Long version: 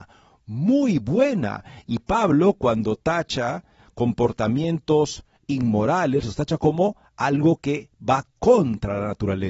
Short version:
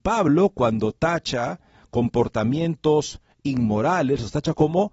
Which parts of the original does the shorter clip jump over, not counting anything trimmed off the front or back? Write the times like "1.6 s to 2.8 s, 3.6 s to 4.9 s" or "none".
none